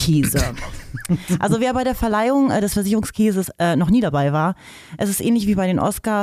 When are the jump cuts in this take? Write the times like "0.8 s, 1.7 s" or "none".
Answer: none